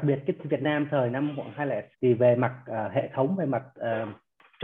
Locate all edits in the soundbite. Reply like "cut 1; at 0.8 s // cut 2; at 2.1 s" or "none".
cut 1; at 1.9 s